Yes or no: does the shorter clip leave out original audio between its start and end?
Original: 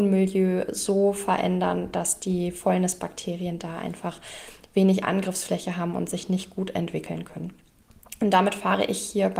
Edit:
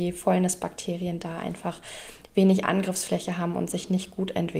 no